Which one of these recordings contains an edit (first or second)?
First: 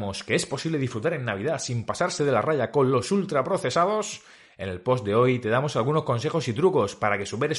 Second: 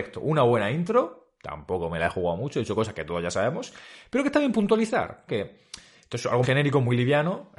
second